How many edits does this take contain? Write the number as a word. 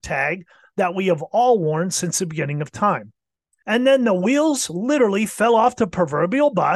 one